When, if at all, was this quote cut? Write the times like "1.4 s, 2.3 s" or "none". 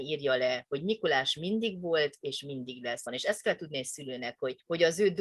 3.1 s